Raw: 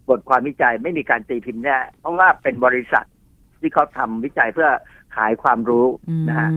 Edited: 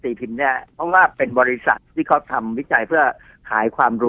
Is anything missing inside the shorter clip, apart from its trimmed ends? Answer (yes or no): yes